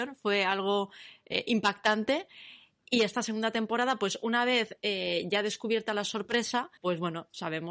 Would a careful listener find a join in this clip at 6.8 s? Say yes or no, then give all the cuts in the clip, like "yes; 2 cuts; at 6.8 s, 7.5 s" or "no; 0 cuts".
yes; 1 cut; at 6.8 s